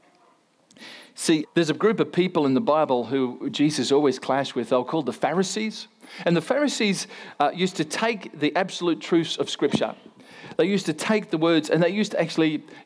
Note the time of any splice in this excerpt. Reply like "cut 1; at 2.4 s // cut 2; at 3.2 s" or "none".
cut 1; at 1.4 s

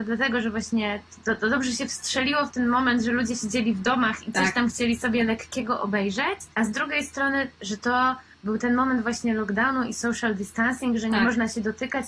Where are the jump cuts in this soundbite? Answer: none

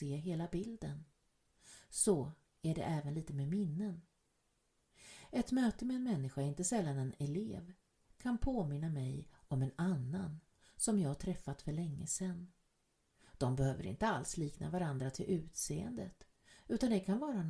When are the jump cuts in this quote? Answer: none

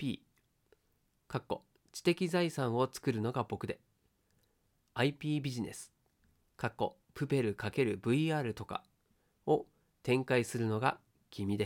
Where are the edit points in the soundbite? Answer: none

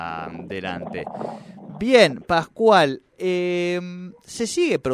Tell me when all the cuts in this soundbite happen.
none

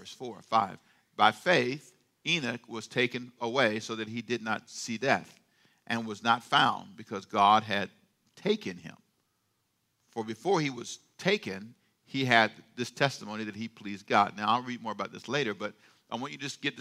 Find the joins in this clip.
cut 1; at 3.4 s

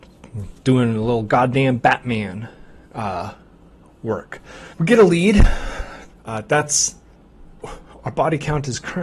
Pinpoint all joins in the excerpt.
cut 1; at 4.7 s // cut 2; at 6.1 s

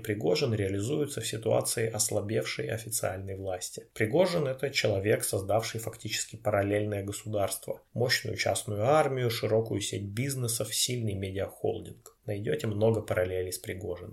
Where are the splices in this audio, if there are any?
cut 1; at 3.9 s // cut 2; at 12.2 s

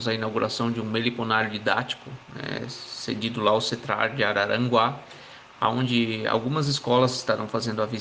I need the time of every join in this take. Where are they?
none

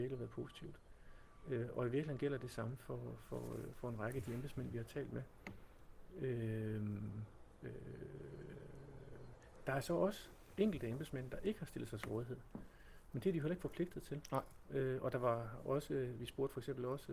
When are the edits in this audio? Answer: none

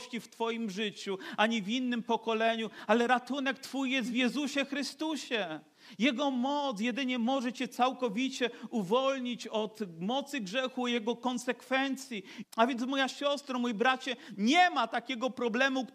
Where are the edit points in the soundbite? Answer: cut 1; at 12.4 s

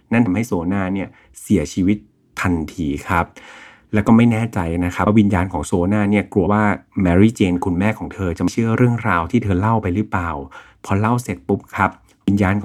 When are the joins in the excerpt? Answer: cut 1; at 6.5 s

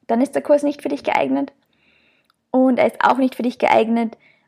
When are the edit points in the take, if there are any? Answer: none

